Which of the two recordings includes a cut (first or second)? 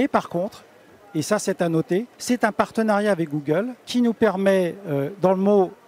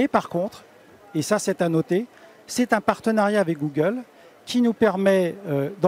first